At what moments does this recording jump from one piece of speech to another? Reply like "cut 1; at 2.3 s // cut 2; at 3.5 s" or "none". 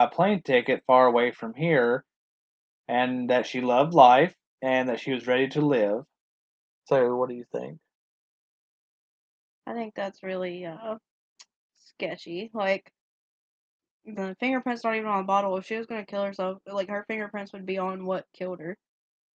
cut 1; at 6.8 s // cut 2; at 14.1 s